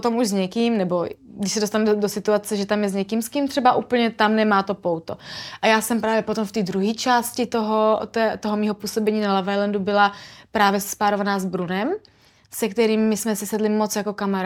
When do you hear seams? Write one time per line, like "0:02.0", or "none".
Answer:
none